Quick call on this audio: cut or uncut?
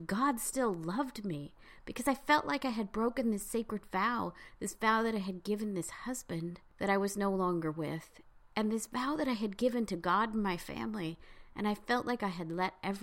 uncut